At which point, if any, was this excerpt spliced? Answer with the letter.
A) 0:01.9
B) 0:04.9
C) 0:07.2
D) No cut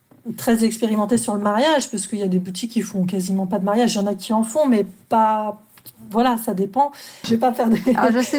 C